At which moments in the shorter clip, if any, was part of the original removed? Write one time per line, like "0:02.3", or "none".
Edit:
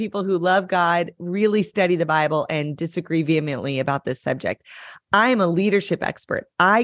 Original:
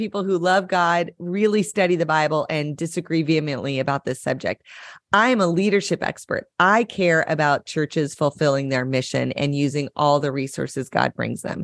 none